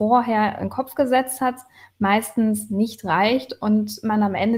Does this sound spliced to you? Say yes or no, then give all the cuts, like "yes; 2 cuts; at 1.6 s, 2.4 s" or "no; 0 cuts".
no; 0 cuts